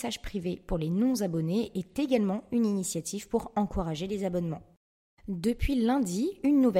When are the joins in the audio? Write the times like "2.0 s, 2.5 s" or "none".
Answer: none

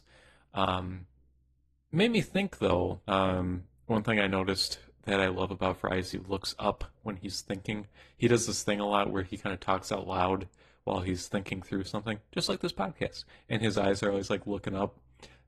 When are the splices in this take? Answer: 3.1 s

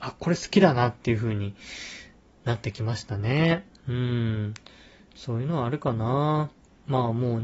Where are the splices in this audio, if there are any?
none

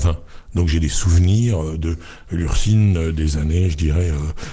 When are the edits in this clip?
none

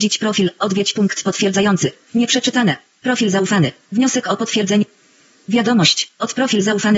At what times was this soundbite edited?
2.1 s

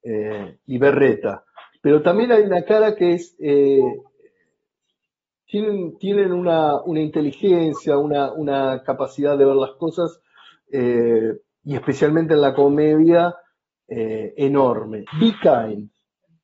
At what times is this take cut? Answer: 15.1 s

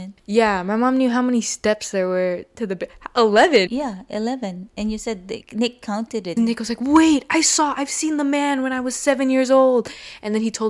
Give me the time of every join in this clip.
3.7 s, 6.4 s

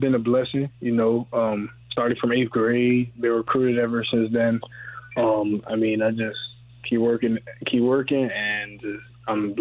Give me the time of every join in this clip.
1.8 s

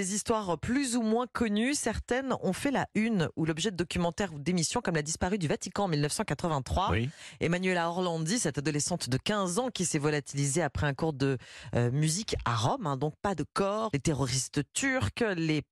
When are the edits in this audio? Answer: 13.9 s

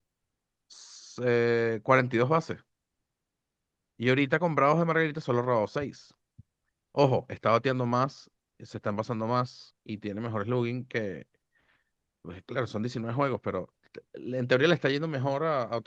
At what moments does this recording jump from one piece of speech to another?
none

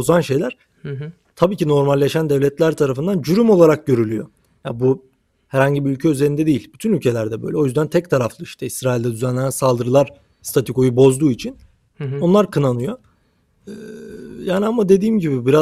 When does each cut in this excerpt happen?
none

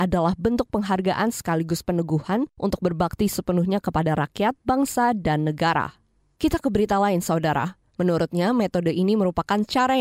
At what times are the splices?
7.9 s

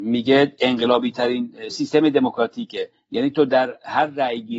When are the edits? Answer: 1.7 s

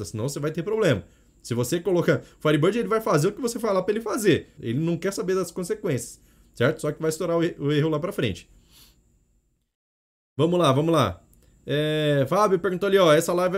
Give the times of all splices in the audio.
4.6 s

